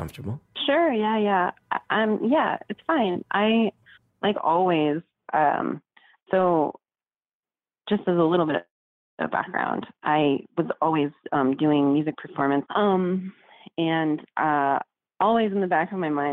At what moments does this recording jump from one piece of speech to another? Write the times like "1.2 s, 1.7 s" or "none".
12.6 s